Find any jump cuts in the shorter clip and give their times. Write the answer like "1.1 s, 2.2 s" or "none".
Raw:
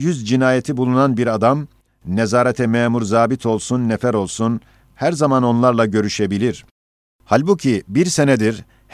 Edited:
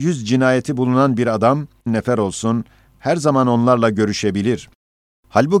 1.9 s